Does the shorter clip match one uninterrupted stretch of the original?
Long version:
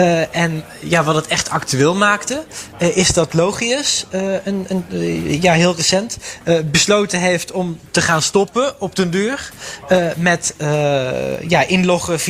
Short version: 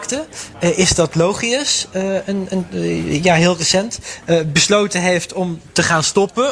yes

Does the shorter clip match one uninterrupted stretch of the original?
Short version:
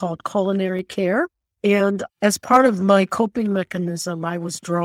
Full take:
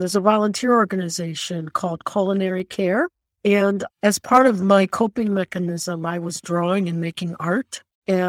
yes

